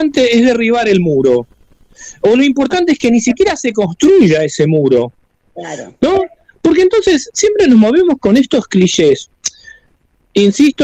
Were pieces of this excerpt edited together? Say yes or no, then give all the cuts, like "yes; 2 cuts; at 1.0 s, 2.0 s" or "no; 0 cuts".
no; 0 cuts